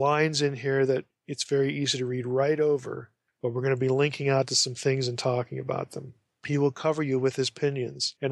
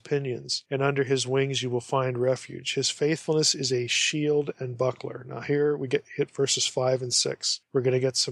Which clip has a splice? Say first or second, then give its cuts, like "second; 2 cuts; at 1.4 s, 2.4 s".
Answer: first; 1 cut; at 6.3 s